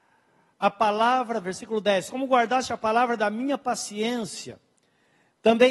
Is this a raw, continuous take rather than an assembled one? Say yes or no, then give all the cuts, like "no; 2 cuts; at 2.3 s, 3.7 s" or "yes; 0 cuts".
yes; 0 cuts